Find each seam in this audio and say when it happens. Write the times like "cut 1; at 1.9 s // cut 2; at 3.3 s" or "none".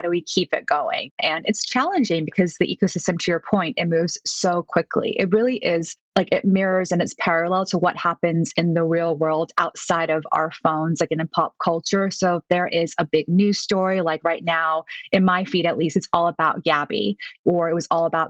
none

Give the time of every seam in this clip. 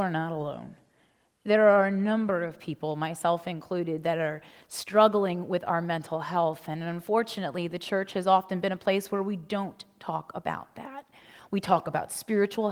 none

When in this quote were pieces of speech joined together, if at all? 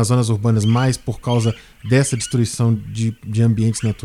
none

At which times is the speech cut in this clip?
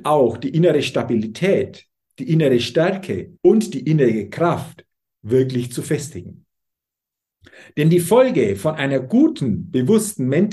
cut 1; at 3.4 s

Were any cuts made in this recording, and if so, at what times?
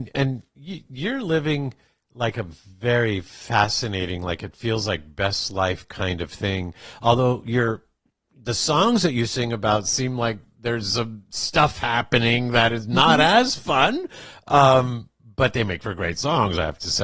none

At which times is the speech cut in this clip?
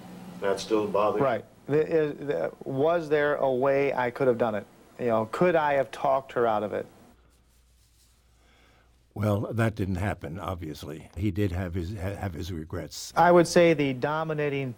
cut 1; at 11.2 s // cut 2; at 13.1 s

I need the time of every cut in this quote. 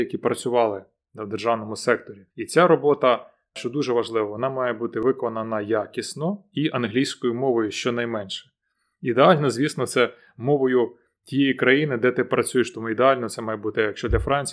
cut 1; at 2.3 s

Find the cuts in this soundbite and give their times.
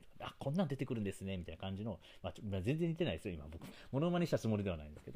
cut 1; at 3.7 s

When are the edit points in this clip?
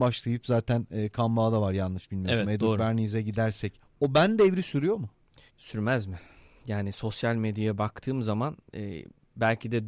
cut 1; at 5.5 s

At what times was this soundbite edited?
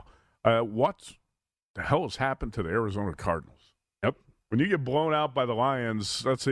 none

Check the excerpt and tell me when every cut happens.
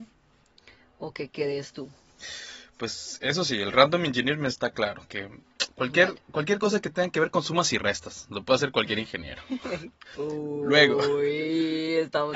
none

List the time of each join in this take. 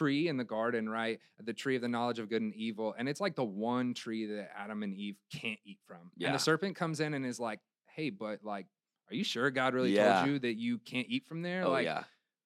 none

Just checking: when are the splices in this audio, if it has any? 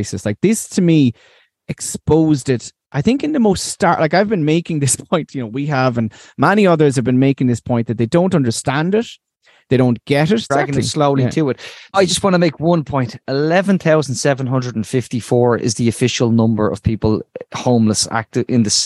cut 1; at 10.5 s // cut 2; at 11.9 s

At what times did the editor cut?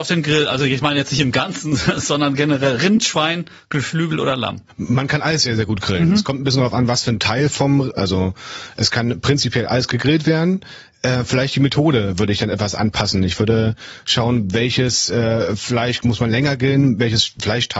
cut 1; at 8.0 s

